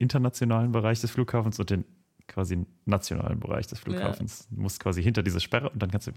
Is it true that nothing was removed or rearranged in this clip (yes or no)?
yes